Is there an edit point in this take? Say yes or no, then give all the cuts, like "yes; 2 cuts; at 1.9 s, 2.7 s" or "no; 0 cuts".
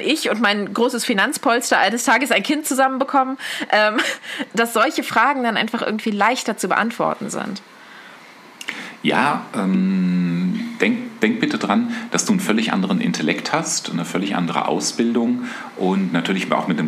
yes; 1 cut; at 4.5 s